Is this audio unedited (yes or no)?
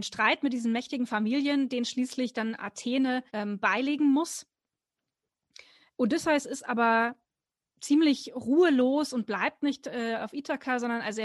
no